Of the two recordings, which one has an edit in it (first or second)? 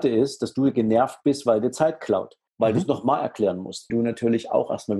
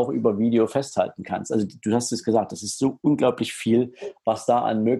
first